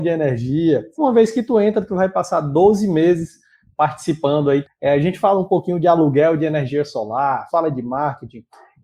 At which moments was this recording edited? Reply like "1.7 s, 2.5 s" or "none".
0.9 s, 4.6 s, 7.5 s